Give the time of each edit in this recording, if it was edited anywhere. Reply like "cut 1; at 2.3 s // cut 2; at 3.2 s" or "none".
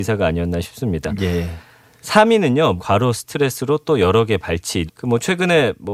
cut 1; at 2.8 s // cut 2; at 4.9 s